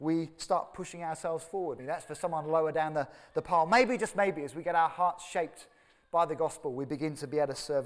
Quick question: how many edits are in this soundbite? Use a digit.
1